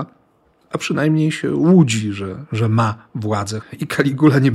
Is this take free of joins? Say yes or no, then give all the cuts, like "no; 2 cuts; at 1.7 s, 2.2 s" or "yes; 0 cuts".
no; 1 cut; at 3.6 s